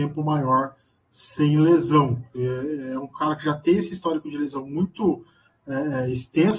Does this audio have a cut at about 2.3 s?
yes; 1 cut; at 2.3 s

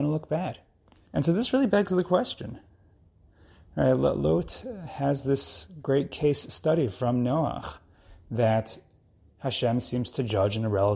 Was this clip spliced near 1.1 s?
yes; 1 cut; at 1.1 s

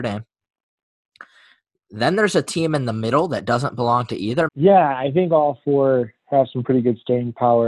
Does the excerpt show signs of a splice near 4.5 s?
yes; 1 cut; at 4.5 s

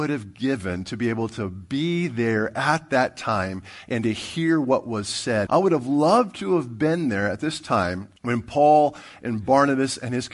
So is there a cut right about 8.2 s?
yes; 2 cuts; at 5.5 s, 8.2 s

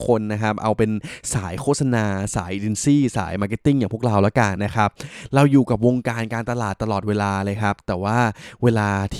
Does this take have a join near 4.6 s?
yes; 1 cut; at 4.6 s

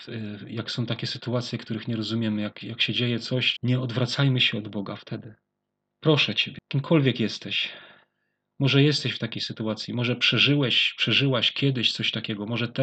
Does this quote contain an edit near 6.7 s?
no; 1 cut; at 3.5 s

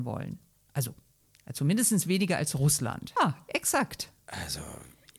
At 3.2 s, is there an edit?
yes; 1 cut; at 3.2 s

